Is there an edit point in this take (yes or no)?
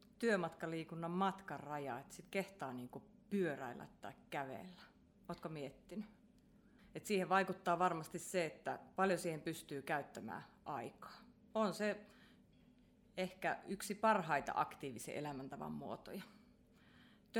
yes